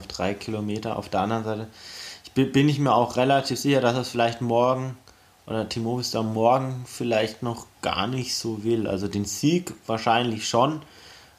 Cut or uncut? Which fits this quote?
uncut